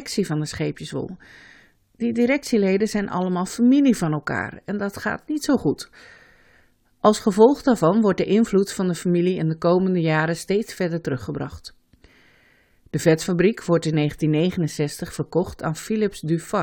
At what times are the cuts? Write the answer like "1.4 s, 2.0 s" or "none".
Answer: none